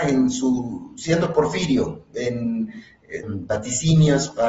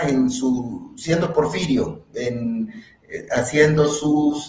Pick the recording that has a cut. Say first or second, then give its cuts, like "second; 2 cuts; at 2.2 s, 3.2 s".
first; 1 cut; at 3.2 s